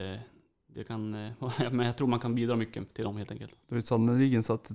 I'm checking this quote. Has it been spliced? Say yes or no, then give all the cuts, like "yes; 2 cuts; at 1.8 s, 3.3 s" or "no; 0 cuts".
yes; 1 cut; at 3.6 s